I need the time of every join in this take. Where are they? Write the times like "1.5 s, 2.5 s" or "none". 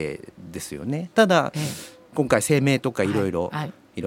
none